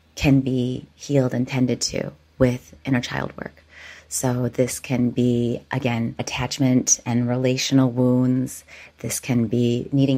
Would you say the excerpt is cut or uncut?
uncut